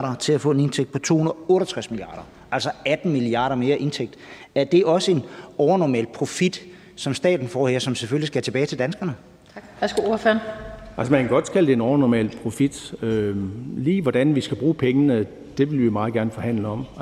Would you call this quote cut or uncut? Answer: uncut